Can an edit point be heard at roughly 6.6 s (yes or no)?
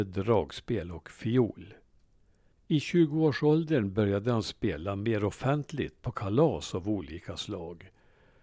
no